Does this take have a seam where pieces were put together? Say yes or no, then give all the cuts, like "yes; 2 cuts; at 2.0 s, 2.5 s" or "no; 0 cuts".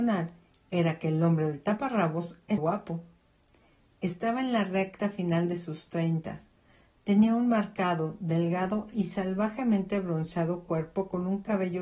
yes; 1 cut; at 2.6 s